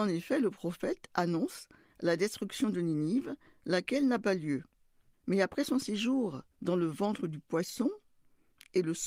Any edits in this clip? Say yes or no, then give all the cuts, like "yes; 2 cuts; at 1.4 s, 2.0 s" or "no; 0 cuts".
yes; 2 cuts; at 5.1 s, 6.5 s